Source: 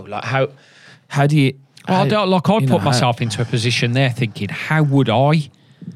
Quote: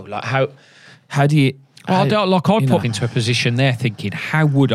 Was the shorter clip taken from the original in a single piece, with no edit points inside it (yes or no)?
no